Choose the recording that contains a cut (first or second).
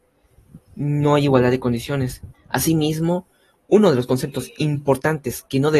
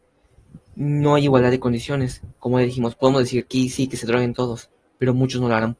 first